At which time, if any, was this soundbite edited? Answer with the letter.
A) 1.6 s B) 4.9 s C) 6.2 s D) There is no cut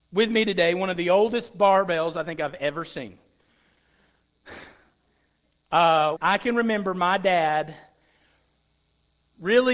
C